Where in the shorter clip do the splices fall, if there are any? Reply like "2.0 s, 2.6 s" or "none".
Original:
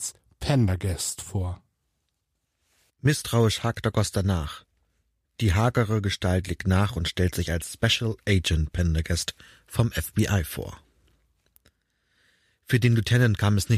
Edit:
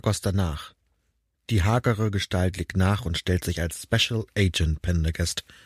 none